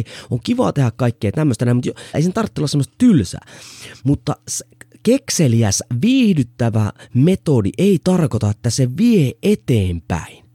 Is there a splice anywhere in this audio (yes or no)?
yes